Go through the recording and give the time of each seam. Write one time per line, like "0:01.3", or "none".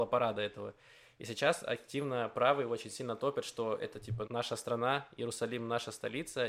0:04.2